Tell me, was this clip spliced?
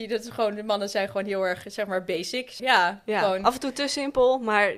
yes; 1 cut; at 2.6 s

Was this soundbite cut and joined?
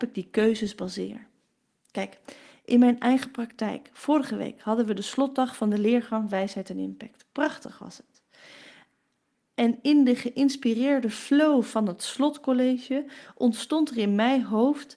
no; 0 cuts

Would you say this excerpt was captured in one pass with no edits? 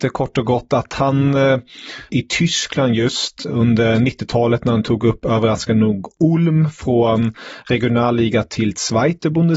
no; 1 cut; at 2.1 s

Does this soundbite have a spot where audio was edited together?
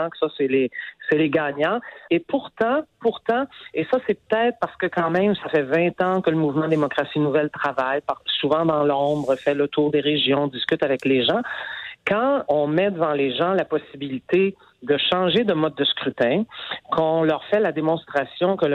yes; 2 cuts; at 2.1 s, 12.5 s

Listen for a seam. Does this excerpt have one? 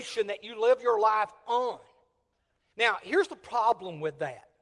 yes; 1 cut; at 2.7 s

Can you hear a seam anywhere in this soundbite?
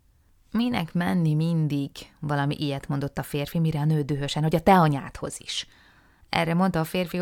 no; 0 cuts

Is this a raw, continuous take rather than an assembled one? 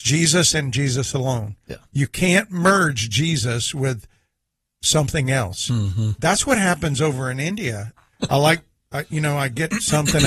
no; 1 cut; at 8.0 s

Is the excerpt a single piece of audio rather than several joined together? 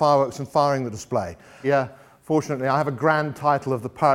no; 1 cut; at 1.6 s

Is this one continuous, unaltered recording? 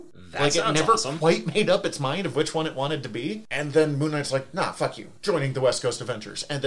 yes; 0 cuts

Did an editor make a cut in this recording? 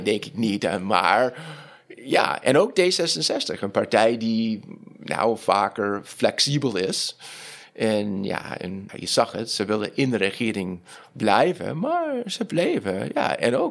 yes; 1 cut; at 8.9 s

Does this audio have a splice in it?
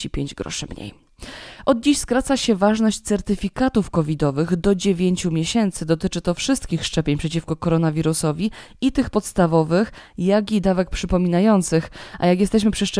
no; 0 cuts

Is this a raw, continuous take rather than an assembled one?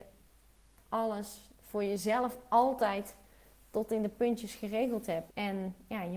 no; 1 cut; at 5.3 s

